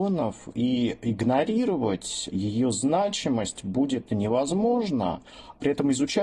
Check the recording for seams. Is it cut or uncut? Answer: cut